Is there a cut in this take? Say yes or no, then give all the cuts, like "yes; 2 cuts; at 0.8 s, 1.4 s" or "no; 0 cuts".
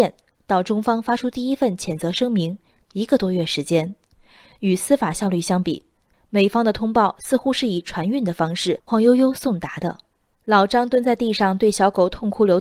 yes; 2 cuts; at 8.9 s, 10.3 s